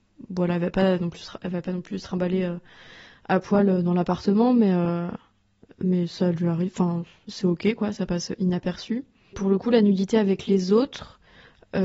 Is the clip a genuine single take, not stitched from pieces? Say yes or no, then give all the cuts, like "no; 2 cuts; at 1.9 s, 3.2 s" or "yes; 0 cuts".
no; 1 cut; at 9.3 s